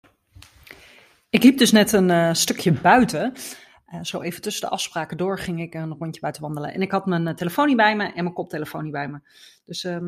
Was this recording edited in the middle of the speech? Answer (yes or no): no